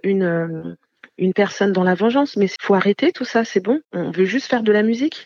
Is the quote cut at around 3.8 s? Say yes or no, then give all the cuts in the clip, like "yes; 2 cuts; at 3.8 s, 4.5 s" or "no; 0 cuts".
yes; 2 cuts; at 2.6 s, 3.8 s